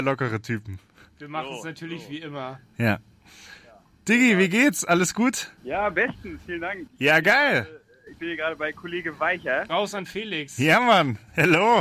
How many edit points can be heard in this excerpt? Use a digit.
2